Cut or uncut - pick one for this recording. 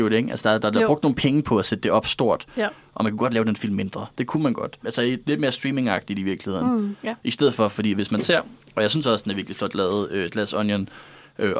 cut